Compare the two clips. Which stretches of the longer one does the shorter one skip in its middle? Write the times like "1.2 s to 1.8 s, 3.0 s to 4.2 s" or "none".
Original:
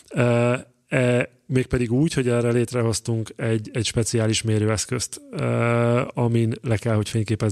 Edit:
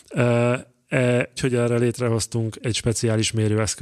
1.4 s to 2.1 s, 3.3 s to 3.7 s